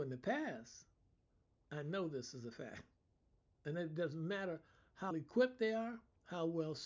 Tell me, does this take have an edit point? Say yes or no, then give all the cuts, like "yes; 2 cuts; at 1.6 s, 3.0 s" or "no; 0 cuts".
yes; 2 cuts; at 1.6 s, 5.1 s